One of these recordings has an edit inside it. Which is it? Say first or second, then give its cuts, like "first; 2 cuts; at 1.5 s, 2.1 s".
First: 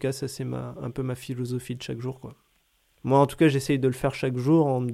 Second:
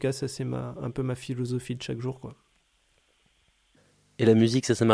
first; 1 cut; at 3.0 s